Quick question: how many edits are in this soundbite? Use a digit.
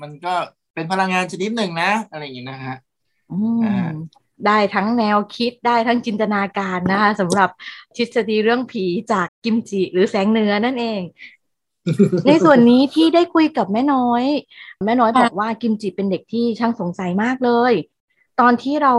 1